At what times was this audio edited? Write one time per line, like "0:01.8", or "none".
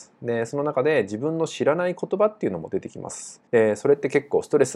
0:03.5

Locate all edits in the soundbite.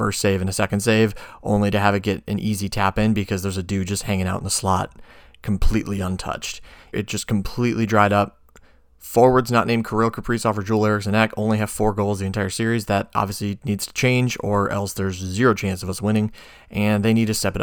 0:06.9

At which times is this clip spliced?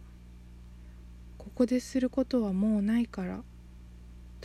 none

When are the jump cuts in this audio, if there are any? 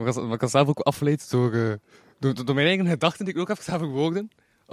0:02.4

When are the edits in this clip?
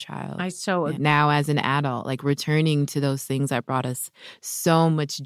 0:01.0

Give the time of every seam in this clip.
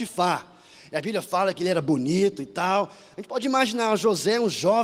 none

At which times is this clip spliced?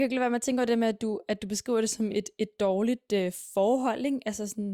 none

